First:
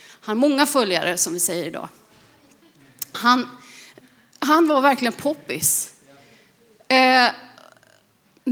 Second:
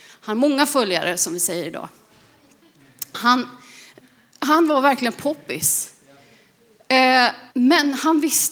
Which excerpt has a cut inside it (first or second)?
second